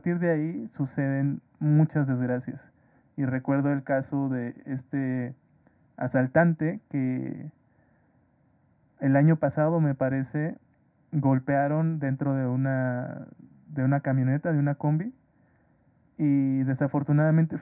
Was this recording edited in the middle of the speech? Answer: no; 0 cuts

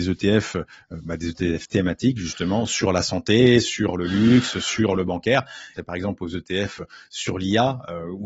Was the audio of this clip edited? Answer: yes; 1 cut; at 5.8 s

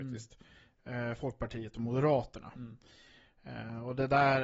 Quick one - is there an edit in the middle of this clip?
no; 0 cuts

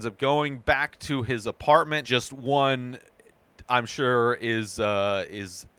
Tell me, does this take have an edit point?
yes; 1 cut; at 2.0 s

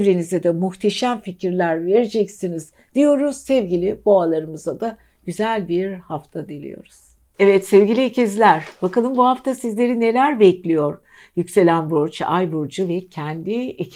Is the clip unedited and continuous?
yes; 0 cuts

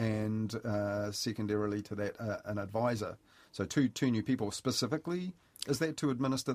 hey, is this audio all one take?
yes; 0 cuts

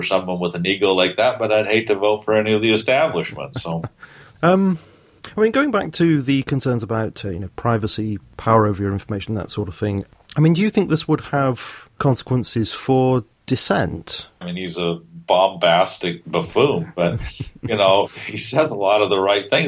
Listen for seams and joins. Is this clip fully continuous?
no; 1 cut; at 14.4 s

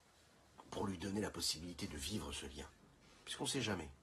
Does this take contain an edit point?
no; 0 cuts

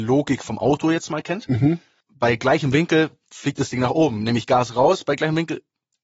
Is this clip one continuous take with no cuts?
no; 1 cut; at 2.0 s

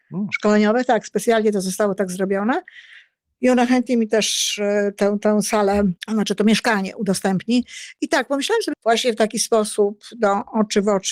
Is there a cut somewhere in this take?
yes; 2 cuts; at 6.0 s, 8.7 s

